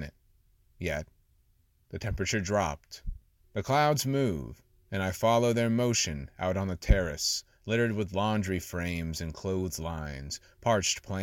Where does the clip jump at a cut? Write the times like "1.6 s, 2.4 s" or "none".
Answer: 3.4 s